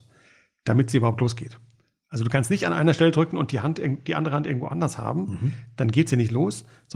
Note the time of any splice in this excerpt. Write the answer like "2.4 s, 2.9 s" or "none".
none

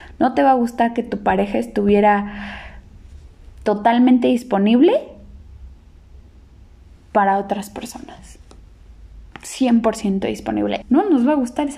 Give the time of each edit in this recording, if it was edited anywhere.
10.8 s

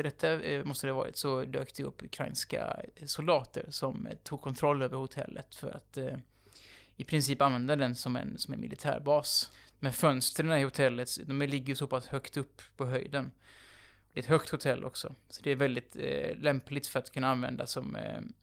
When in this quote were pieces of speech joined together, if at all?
none

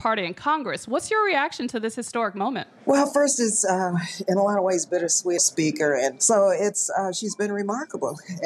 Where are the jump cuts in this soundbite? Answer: 5.4 s

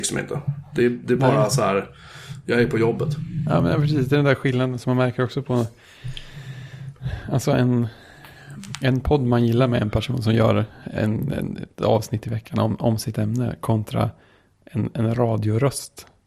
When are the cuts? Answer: none

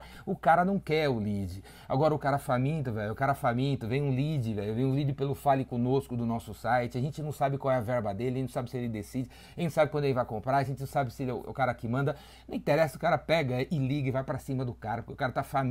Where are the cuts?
none

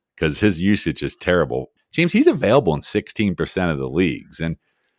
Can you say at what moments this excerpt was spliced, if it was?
1.8 s

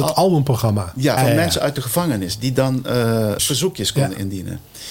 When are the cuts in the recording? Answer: 1.2 s, 3.4 s

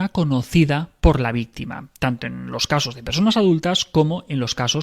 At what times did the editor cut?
none

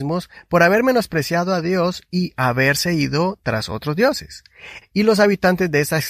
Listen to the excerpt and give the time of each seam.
4.8 s

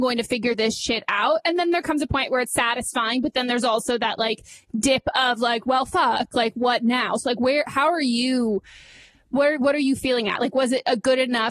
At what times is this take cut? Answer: none

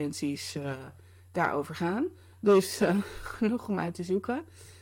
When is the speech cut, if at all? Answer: none

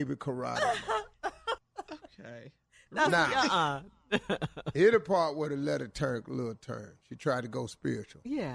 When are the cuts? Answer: none

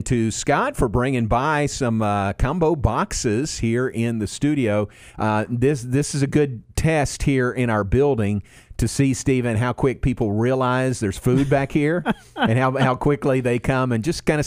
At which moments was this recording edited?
none

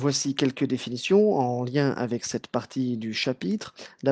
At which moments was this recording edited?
none

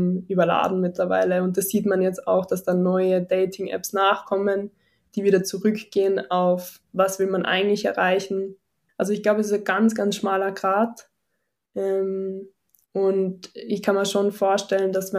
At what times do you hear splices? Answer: 8.9 s

